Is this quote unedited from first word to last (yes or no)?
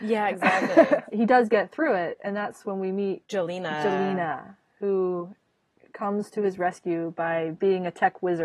yes